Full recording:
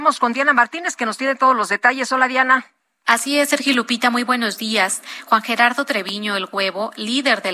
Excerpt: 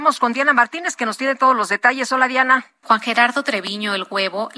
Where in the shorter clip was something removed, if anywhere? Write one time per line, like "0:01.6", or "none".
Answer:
0:02.8

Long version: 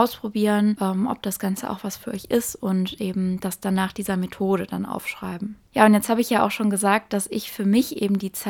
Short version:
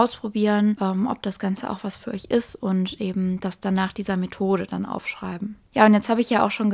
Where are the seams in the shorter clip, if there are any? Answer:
none

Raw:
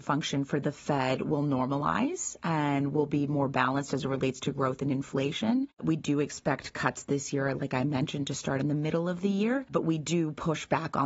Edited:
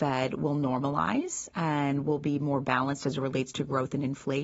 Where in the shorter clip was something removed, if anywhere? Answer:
none

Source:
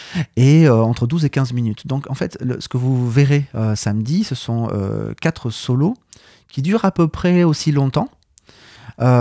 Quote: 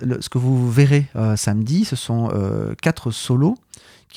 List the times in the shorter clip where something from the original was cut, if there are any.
none

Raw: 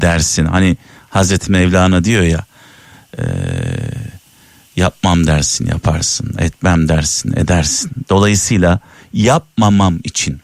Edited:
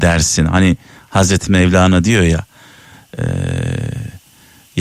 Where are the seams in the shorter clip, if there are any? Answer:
none

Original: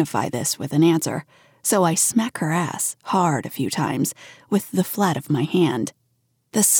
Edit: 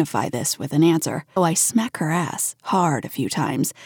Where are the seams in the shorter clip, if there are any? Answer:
0:01.4

